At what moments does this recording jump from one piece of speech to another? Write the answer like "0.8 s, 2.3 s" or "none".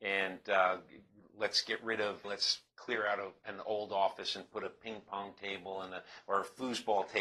2.2 s

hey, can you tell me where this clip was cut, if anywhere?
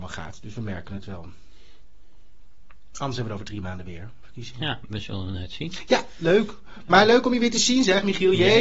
none

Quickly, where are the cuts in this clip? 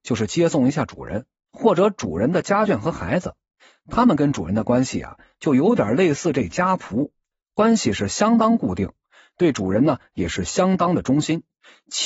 none

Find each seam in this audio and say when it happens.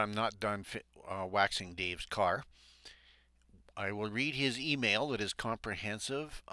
none

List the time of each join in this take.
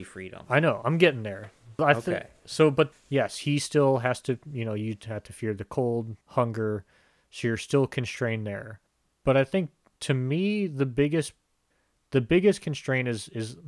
1.8 s, 2.9 s, 6.2 s

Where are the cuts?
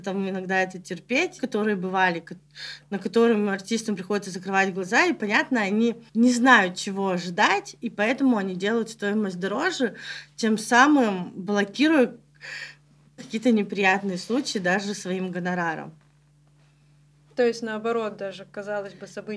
1.4 s, 6.1 s, 13.2 s

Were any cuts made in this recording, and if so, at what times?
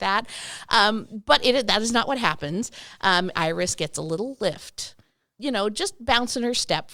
3.3 s, 5.4 s

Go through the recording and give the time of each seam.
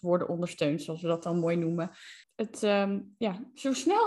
2.2 s

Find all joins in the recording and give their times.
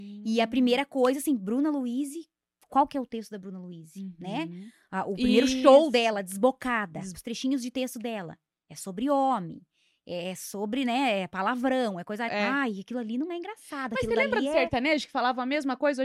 7.1 s, 12.3 s

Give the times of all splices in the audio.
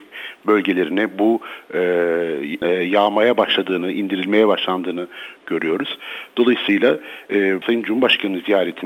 2.6 s, 7.6 s

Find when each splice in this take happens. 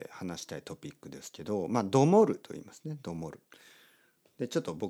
3.4 s

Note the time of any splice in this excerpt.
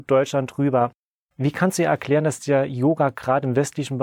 none

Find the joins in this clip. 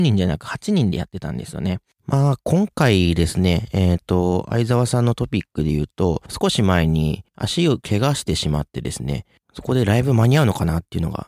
2.0 s

